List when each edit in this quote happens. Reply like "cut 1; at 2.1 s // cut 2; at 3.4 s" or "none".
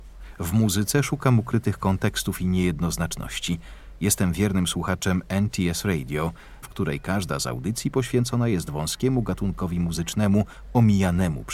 cut 1; at 6.6 s